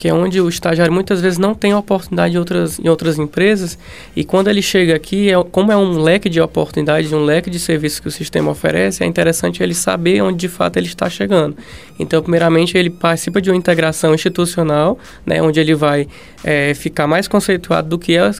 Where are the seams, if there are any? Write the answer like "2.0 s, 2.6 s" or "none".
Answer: none